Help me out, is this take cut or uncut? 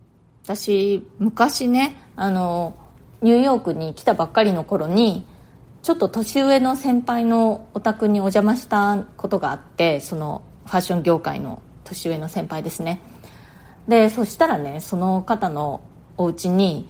uncut